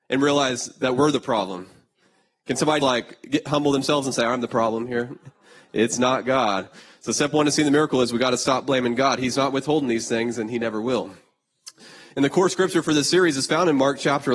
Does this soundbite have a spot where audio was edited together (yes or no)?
yes